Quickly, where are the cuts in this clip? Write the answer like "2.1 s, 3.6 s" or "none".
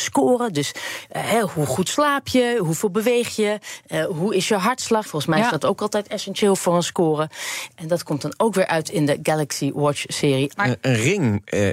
5.1 s, 7.7 s, 10.5 s